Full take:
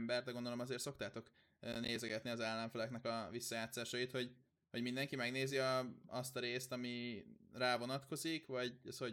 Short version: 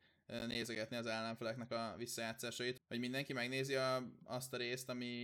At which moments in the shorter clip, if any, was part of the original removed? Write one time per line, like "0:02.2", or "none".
0:02.8